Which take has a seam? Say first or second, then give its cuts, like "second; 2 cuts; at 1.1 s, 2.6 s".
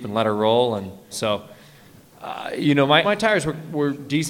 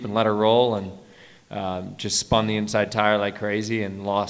first; 2 cuts; at 1.1 s, 3.0 s